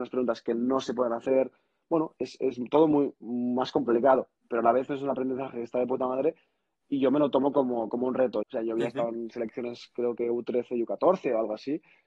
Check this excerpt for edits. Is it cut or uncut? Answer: cut